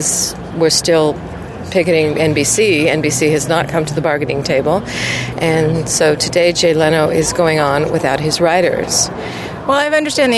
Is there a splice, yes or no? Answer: no